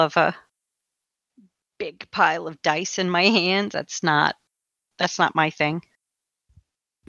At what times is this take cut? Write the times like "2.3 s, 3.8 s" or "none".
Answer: none